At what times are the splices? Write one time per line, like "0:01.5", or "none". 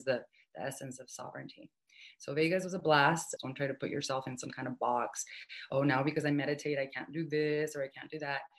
0:03.4